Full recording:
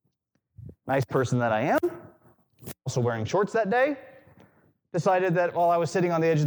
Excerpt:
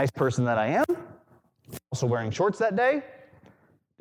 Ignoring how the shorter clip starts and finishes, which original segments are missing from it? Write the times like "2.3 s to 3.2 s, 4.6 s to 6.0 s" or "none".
none